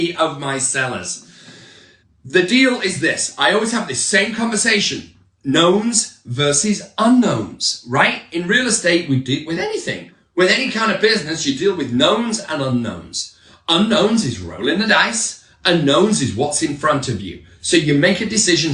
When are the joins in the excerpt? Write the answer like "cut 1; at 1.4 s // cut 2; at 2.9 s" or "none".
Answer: none